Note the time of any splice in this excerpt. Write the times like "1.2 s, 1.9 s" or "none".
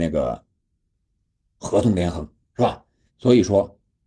3.1 s